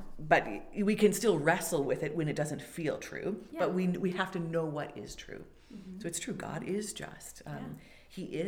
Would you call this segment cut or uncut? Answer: uncut